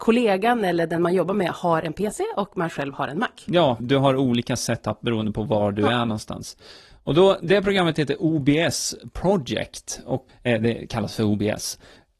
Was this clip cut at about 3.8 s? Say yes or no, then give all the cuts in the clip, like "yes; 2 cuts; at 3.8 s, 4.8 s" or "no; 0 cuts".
yes; 2 cuts; at 3.8 s, 10.3 s